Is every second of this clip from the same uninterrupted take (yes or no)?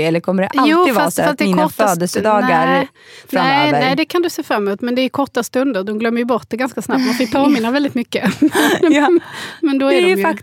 yes